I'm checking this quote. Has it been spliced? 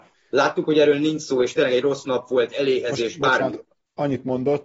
no; 0 cuts

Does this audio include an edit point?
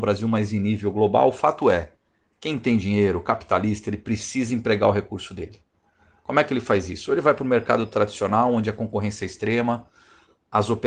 no; 0 cuts

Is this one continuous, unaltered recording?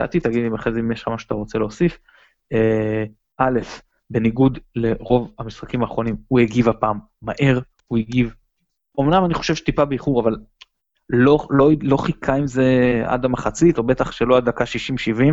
yes; 0 cuts

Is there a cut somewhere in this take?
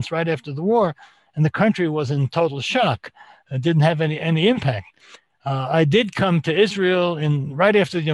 yes; 1 cut; at 3.4 s

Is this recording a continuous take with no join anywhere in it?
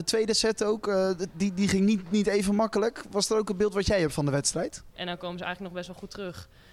no; 1 cut; at 4.9 s

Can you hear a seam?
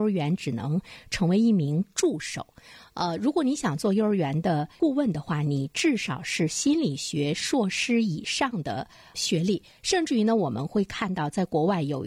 no; 0 cuts

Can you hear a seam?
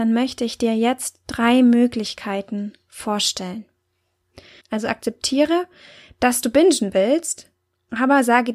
yes; 1 cut; at 4.6 s

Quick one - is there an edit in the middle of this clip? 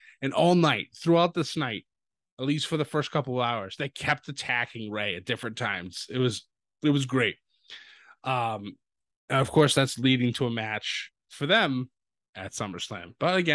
no; 0 cuts

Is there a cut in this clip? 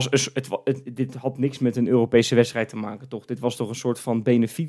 no; 0 cuts

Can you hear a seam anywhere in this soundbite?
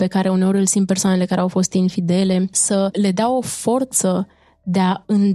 no; 0 cuts

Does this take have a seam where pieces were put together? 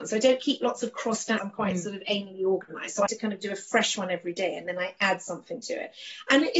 yes; 2 cuts; at 1.4 s, 3.1 s

